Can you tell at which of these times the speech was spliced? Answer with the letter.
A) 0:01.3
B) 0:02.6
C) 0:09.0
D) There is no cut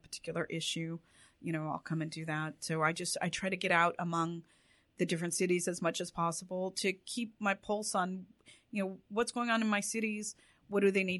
D